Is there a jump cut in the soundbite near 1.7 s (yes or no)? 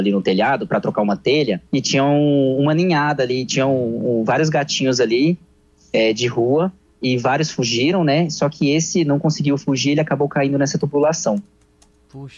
yes